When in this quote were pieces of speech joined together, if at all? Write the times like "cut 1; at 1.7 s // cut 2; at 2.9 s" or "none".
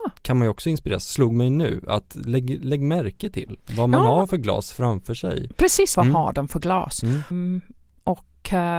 cut 1; at 5.9 s // cut 2; at 7.3 s